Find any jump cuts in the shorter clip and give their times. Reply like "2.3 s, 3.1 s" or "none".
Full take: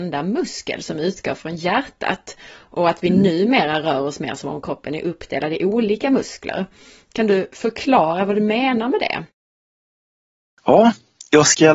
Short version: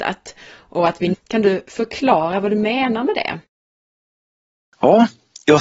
1.1 s